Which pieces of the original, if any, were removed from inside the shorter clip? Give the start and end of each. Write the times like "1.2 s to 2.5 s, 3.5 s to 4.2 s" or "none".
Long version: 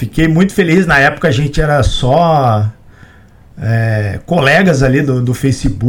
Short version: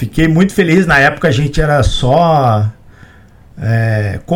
none